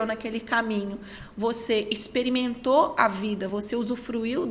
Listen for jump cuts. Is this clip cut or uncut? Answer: uncut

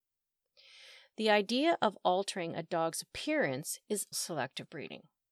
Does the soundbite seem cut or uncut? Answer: cut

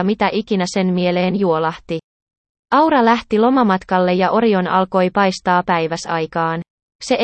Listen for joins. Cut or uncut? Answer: cut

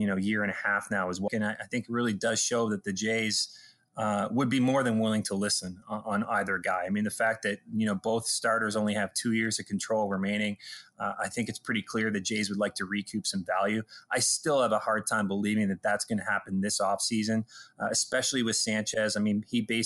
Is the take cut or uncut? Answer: cut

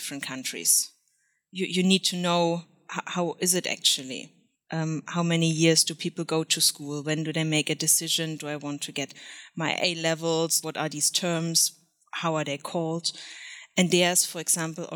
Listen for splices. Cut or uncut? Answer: cut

